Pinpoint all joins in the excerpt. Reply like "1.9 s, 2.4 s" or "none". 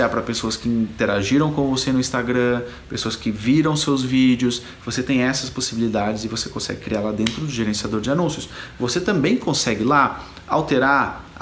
none

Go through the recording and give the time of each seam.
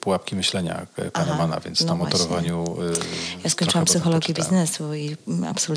none

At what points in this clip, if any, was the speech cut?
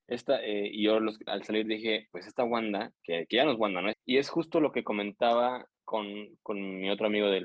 1.3 s, 3.9 s

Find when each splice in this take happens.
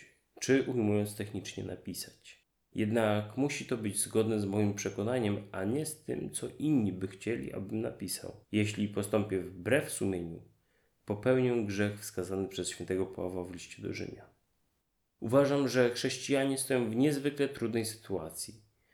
8.4 s

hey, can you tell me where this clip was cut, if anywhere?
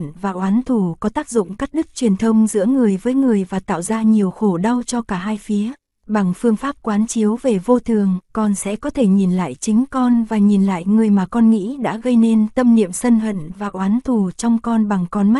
6.0 s, 8.3 s

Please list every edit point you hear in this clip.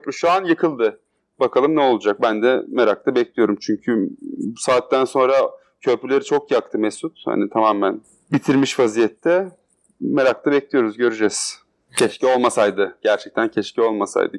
none

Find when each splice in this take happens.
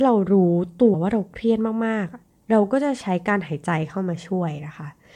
0.9 s

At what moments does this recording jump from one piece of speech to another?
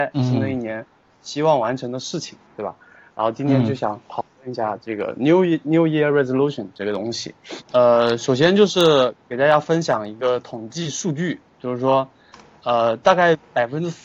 7.6 s

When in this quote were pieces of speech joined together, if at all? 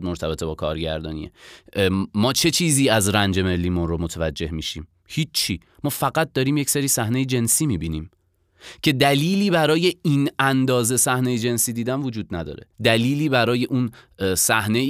12.7 s

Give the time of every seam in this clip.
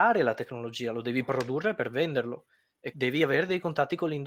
2.9 s

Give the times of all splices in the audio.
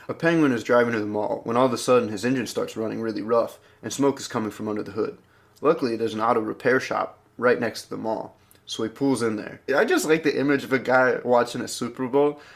9.7 s

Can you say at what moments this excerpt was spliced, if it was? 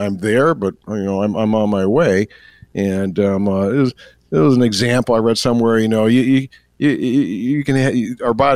none

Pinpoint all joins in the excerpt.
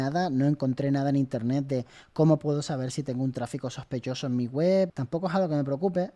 4.9 s

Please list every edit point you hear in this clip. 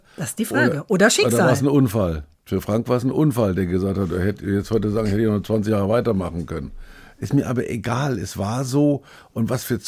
none

